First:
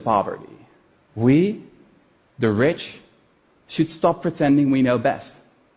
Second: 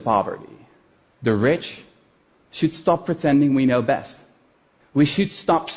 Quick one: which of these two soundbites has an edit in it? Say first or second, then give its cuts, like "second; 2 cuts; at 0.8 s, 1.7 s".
second; 1 cut; at 1.0 s